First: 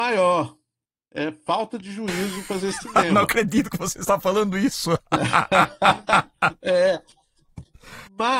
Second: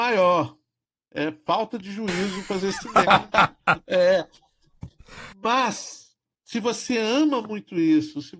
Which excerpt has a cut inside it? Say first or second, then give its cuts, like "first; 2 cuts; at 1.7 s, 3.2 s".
second; 1 cut; at 3.0 s